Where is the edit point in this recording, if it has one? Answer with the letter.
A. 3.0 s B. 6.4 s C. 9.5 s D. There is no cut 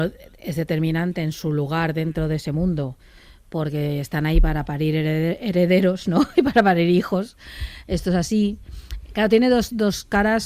D